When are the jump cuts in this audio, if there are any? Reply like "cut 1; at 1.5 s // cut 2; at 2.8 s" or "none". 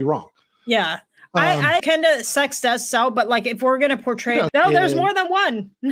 cut 1; at 1.8 s // cut 2; at 4.5 s